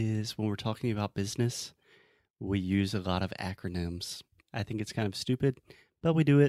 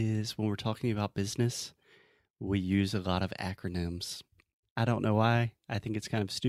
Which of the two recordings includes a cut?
first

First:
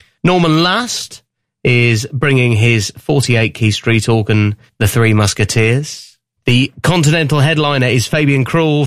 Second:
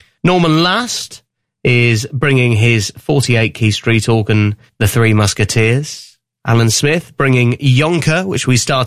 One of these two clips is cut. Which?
first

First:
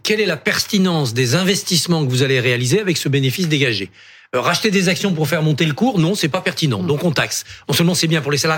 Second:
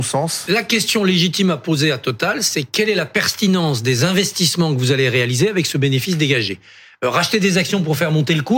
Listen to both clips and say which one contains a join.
first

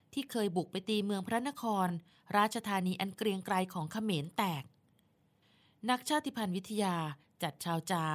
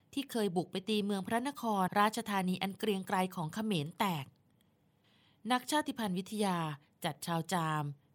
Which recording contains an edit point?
second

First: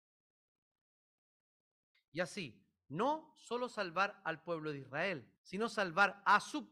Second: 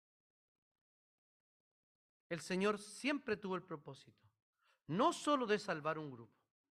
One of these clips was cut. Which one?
first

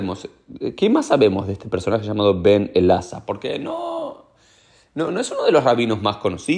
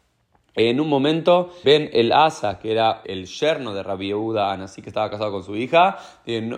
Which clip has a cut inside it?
second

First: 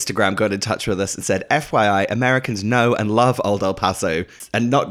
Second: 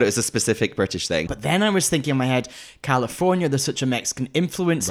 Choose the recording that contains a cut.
second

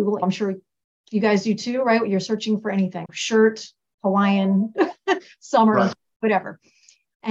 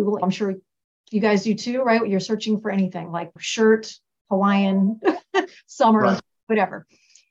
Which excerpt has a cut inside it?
first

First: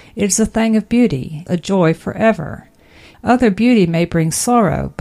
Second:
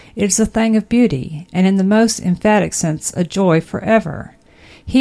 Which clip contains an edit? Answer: first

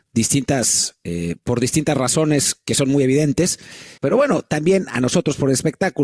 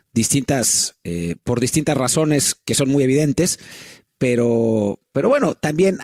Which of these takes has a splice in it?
first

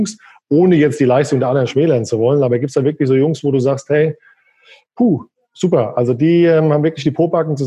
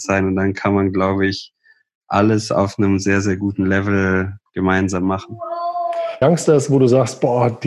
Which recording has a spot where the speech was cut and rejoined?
second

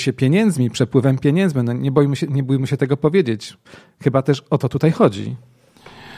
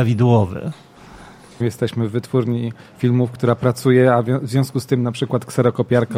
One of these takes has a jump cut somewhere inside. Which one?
second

